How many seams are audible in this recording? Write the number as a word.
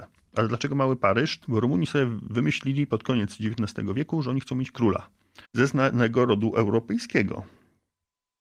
two